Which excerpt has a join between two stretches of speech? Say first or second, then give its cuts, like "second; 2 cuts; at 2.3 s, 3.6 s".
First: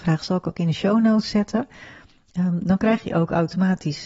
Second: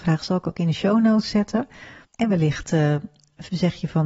second; 1 cut; at 2.0 s